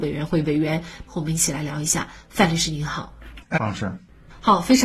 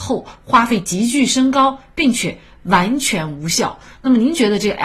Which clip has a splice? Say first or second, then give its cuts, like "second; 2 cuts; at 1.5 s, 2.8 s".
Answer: first; 2 cuts; at 1.1 s, 3.5 s